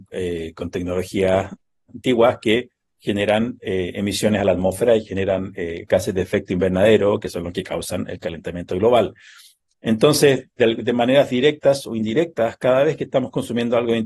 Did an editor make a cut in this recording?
no; 0 cuts

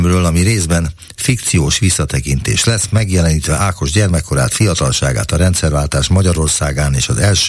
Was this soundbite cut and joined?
no; 0 cuts

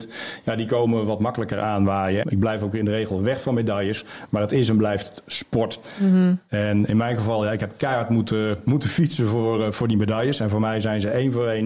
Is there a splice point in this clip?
yes; 1 cut; at 2.2 s

